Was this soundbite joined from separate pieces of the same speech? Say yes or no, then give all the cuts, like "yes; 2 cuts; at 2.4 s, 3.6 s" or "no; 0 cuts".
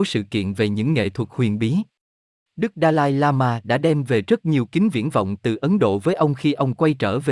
no; 0 cuts